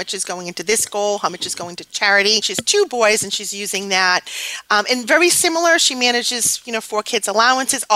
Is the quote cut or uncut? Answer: cut